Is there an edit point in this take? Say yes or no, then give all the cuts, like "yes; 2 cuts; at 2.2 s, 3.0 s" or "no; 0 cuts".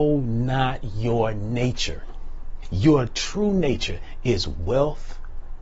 yes; 1 cut; at 2.6 s